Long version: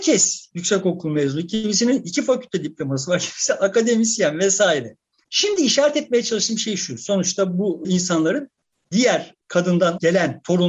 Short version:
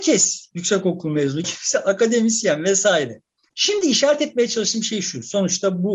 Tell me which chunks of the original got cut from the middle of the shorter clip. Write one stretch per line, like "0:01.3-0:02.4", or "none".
0:01.4-0:03.2